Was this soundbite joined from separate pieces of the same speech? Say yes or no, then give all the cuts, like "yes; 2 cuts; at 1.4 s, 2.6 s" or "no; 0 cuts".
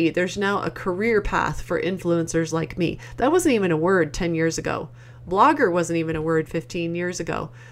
no; 0 cuts